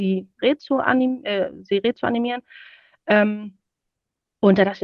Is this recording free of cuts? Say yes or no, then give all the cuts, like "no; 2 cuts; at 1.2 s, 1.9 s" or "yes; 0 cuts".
yes; 0 cuts